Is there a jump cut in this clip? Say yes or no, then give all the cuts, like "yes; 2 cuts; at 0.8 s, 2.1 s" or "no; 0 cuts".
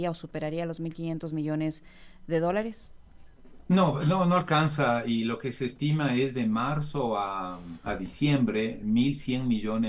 no; 0 cuts